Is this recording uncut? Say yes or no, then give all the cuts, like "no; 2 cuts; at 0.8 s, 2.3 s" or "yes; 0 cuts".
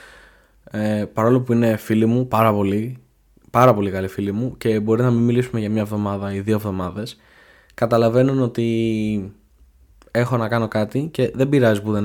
yes; 0 cuts